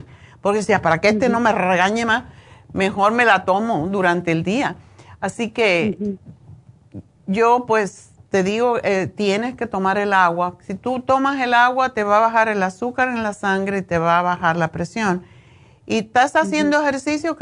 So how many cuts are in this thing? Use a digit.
0